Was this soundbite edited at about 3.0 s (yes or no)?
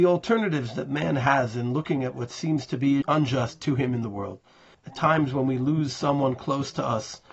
yes